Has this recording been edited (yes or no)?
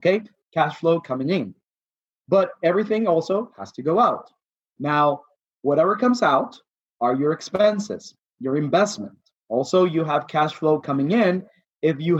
no